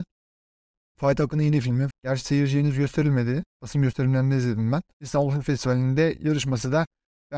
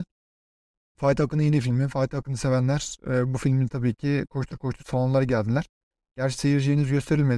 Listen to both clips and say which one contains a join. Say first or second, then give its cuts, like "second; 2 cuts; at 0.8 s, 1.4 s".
first; 2 cuts; at 1.9 s, 4.9 s